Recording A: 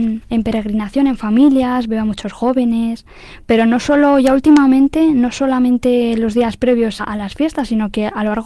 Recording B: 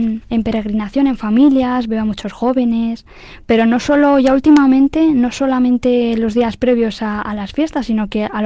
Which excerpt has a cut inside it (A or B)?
A